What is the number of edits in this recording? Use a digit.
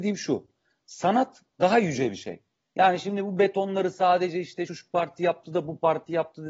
2